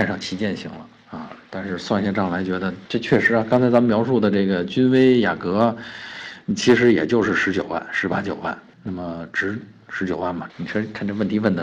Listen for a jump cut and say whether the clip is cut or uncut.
cut